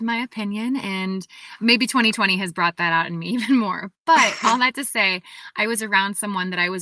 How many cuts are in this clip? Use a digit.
0